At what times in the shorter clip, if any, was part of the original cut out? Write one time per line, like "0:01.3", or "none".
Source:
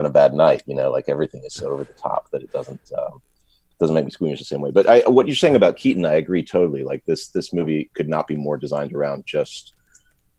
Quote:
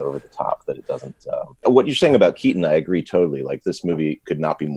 0:01.6
0:03.6